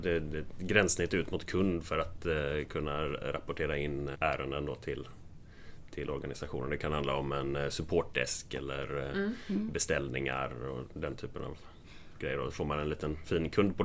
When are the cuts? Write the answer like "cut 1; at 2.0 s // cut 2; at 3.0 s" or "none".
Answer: cut 1; at 4.1 s